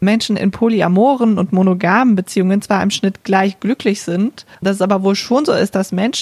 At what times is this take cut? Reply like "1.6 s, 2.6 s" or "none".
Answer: 4.5 s